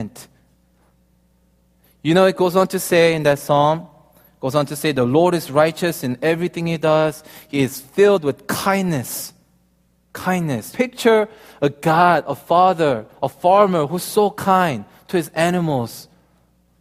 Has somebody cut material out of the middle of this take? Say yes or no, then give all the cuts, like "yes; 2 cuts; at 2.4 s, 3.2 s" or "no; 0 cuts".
yes; 1 cut; at 10.7 s